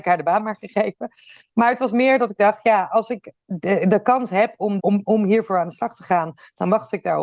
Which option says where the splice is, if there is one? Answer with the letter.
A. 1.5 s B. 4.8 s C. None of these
B